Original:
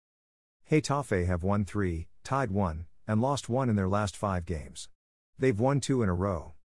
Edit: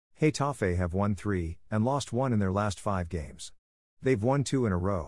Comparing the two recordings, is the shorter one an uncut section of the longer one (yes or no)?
no